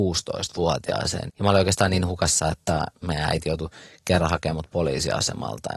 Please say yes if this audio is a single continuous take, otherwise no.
no